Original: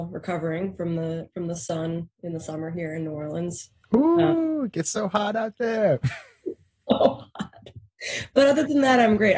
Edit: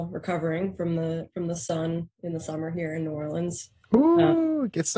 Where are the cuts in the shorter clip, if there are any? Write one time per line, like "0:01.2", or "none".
none